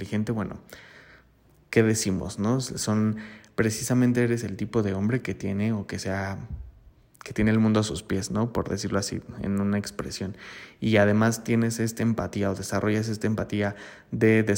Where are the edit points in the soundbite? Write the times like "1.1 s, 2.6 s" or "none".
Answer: none